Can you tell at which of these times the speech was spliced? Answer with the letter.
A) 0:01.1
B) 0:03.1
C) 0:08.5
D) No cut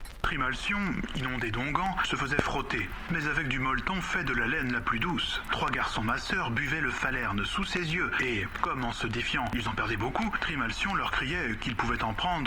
B